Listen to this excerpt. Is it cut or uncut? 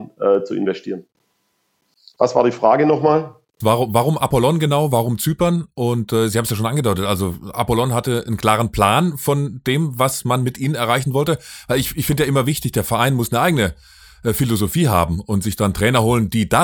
cut